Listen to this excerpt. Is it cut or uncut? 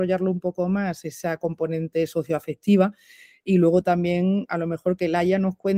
uncut